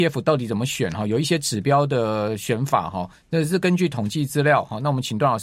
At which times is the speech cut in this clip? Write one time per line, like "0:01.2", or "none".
none

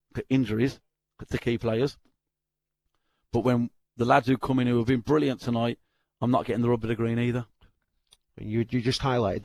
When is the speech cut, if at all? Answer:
none

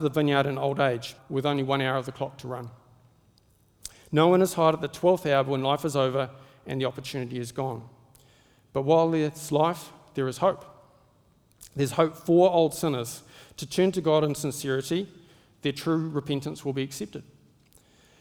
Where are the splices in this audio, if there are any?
0:01.2

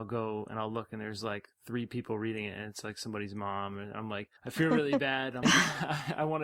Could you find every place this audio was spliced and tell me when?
0:04.4
0:05.4

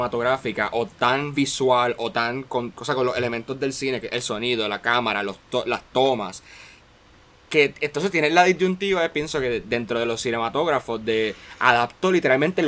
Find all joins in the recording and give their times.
none

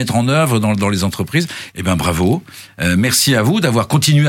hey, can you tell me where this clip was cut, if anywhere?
0:01.7

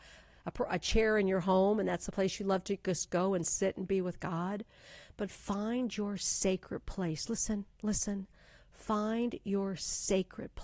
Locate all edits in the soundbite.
none

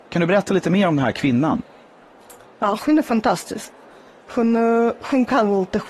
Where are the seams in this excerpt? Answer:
none

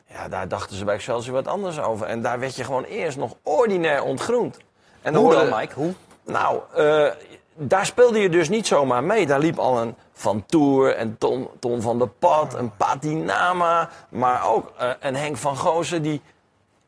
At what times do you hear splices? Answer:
none

